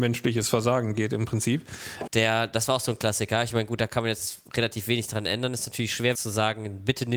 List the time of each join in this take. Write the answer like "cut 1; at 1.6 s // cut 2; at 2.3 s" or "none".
cut 1; at 2.1 s // cut 2; at 6.1 s